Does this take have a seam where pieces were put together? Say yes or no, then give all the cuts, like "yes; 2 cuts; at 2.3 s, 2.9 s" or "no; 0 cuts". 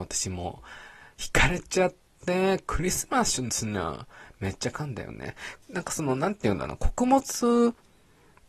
yes; 1 cut; at 5.6 s